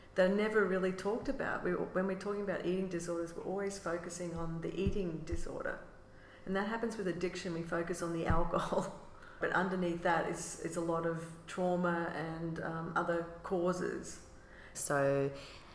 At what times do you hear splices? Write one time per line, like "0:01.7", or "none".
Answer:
0:09.4
0:14.7